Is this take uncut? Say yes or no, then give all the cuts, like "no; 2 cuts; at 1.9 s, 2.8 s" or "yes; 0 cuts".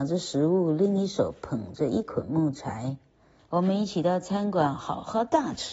no; 1 cut; at 3.4 s